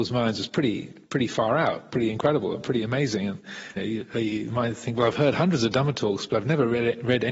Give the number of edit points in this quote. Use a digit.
1